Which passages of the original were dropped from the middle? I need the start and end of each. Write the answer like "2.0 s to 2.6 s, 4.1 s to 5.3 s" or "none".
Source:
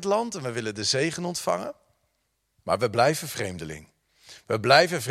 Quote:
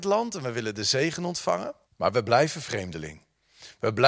1.8 s to 2.5 s